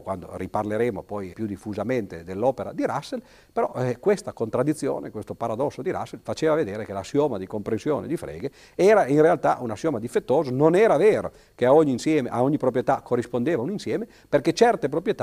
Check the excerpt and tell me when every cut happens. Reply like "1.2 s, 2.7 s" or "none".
1.3 s

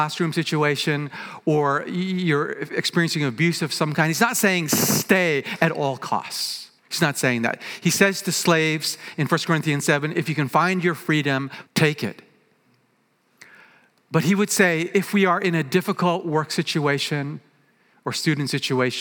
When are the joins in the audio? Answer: 6.8 s, 11.6 s

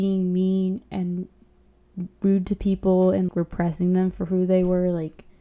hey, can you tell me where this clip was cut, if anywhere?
3.3 s

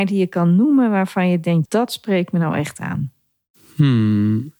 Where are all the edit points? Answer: 1.7 s

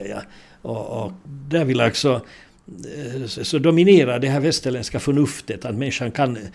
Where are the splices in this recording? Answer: 3.4 s

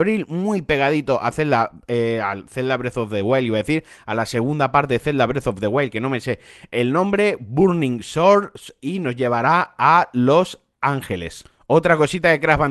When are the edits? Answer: none

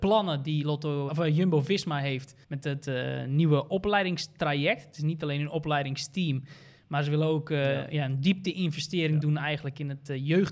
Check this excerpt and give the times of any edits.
1.1 s, 2.4 s

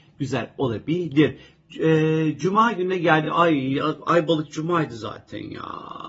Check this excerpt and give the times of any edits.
none

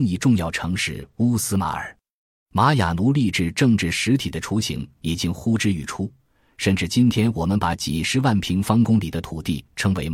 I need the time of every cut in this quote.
none

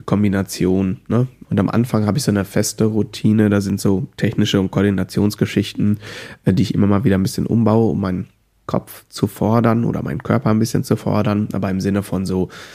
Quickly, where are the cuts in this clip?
1.4 s

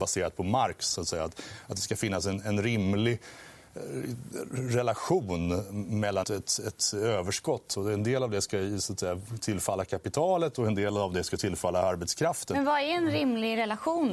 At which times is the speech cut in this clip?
6.2 s

